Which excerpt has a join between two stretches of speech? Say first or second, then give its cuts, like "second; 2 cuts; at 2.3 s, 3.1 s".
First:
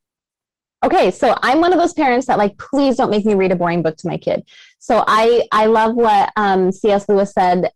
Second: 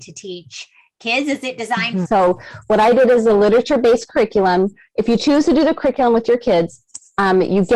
second; 1 cut; at 2.0 s